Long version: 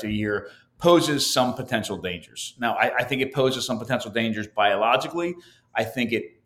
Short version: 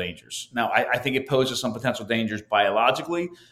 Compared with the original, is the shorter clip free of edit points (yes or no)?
yes